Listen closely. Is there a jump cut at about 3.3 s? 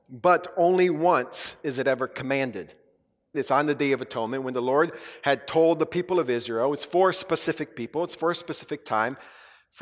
yes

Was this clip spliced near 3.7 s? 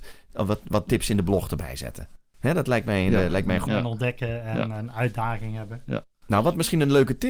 yes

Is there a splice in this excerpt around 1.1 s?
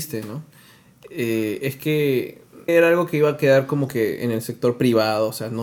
no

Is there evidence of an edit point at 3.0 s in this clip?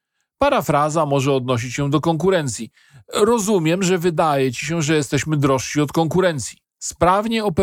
no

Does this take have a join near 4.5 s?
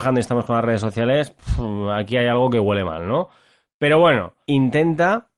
yes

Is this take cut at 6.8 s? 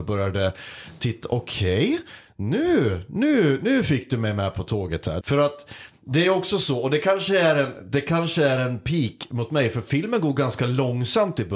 no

